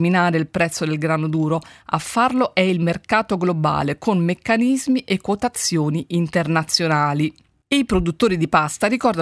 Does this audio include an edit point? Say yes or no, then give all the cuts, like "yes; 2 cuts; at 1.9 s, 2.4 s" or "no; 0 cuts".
no; 0 cuts